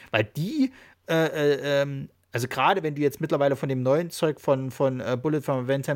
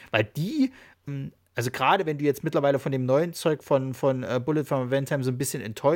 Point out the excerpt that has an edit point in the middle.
second; 1 cut; at 1.1 s

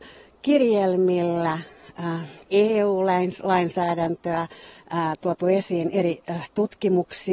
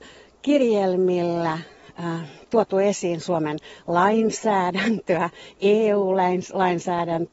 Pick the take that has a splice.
first; 1 cut; at 2.4 s

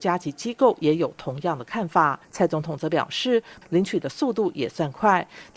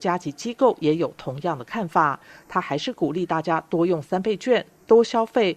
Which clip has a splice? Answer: first; 2 cuts; at 2.2 s, 3.6 s

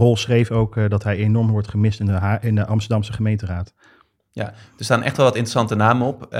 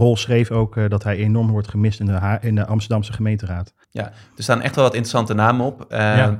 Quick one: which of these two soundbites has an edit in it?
second; 1 cut; at 3.8 s

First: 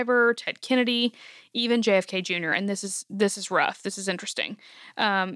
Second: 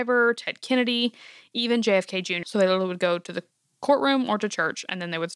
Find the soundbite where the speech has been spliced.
second; 1 cut; at 2.4 s

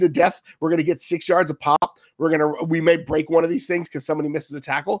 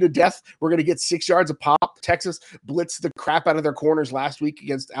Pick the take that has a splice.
second; 1 cut; at 2.0 s

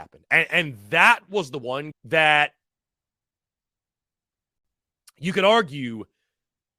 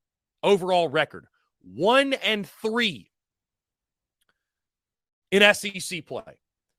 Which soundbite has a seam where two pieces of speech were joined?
first; 1 cut; at 1.9 s

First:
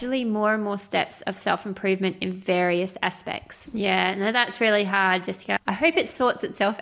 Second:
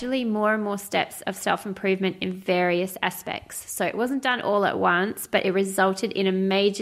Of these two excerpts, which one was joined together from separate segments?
first; 2 cuts; at 3.7 s, 5.6 s

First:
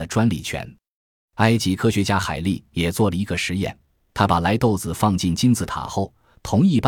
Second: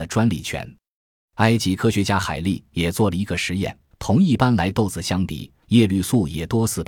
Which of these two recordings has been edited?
second; 2 cuts; at 3.9 s, 5.6 s

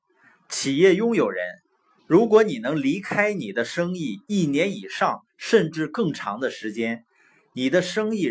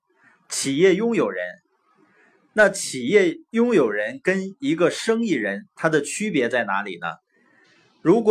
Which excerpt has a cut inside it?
first; 1 cut; at 2.0 s

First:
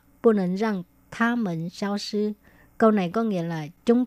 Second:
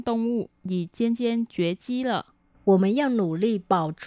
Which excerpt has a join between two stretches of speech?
second; 1 cut; at 2.5 s

